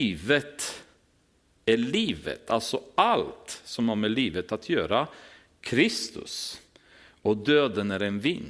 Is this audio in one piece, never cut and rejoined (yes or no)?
yes